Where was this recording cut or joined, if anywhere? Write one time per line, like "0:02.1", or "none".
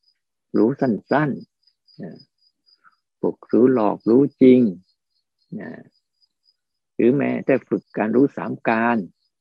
0:07.8